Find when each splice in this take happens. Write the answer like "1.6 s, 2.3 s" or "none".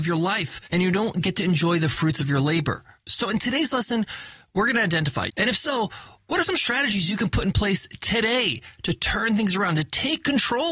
5.3 s